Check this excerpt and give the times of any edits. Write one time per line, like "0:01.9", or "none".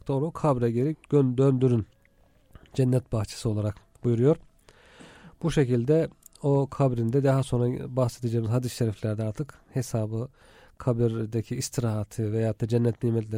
0:00.9